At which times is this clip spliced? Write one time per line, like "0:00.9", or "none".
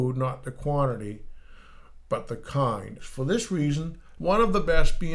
0:03.0
0:04.2